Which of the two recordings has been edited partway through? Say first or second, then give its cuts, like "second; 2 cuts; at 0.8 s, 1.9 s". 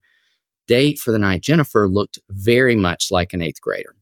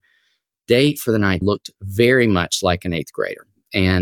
second; 1 cut; at 1.4 s